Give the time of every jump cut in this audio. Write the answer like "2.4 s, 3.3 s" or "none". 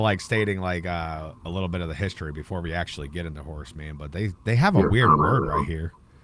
1.4 s